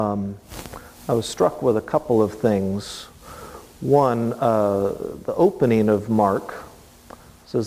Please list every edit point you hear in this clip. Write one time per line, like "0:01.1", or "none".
none